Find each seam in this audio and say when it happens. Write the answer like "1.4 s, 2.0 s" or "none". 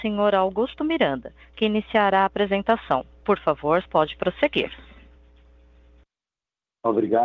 3.9 s